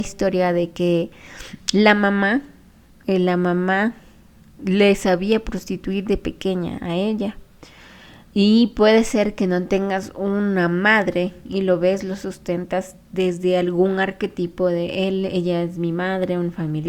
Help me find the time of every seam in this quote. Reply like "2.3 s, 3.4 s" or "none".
8.3 s